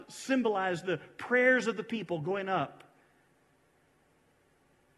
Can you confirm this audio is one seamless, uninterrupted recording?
yes; 0 cuts

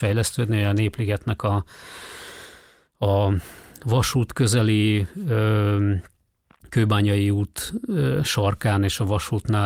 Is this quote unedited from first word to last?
yes; 0 cuts

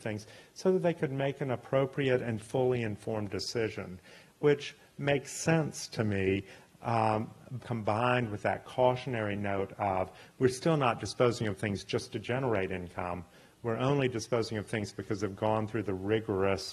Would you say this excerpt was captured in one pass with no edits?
no; 1 cut; at 7.6 s

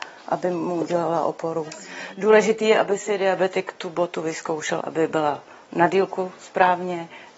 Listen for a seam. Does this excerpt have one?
yes; 1 cut; at 4.8 s

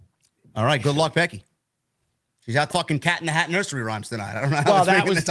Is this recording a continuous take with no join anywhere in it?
no; 1 cut; at 2.7 s

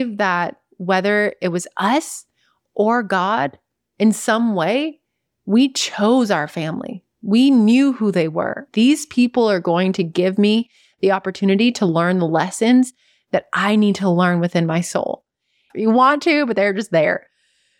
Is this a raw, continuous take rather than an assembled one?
no; 2 cuts; at 8.7 s, 15.7 s

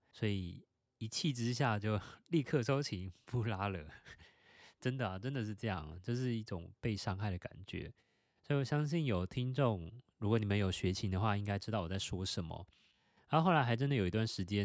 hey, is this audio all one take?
yes; 0 cuts

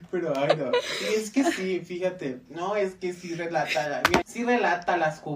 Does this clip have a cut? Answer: yes; 2 cuts; at 2.5 s, 4.2 s

